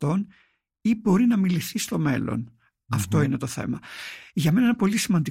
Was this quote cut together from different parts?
no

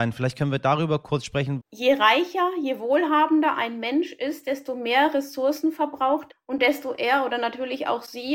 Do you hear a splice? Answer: yes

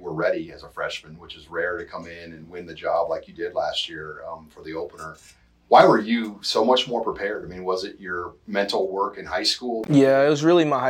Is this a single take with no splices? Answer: yes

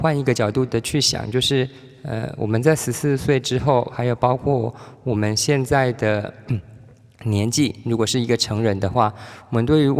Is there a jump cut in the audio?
no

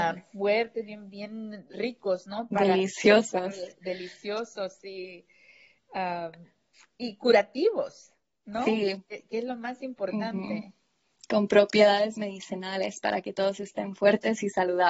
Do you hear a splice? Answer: no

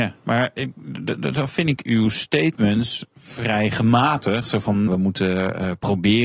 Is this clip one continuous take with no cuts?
no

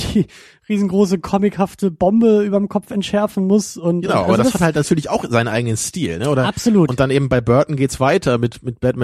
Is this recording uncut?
yes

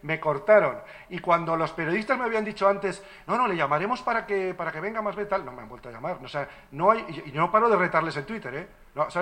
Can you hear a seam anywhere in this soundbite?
no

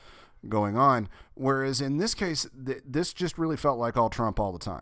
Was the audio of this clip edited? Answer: no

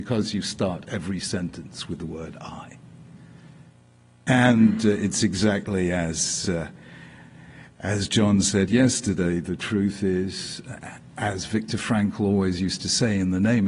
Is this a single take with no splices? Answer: yes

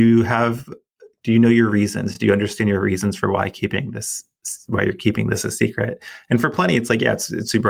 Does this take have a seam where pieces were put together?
no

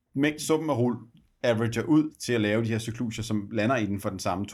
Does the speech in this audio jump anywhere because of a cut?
no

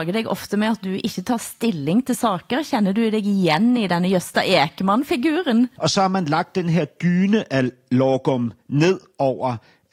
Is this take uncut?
no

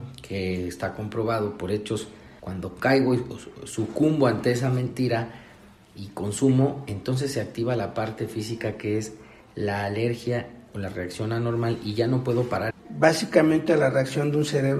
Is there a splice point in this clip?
yes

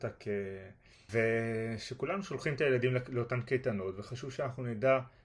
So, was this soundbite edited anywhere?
yes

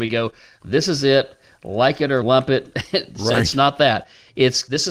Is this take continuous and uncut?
yes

